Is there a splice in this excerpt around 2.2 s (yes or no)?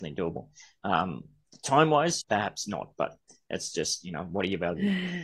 yes